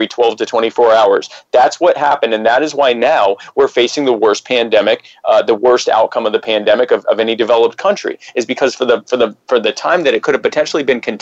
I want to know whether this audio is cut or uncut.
uncut